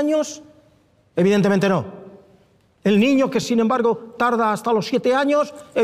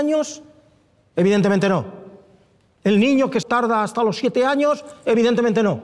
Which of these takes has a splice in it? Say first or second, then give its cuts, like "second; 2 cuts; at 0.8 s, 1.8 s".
second; 1 cut; at 3.4 s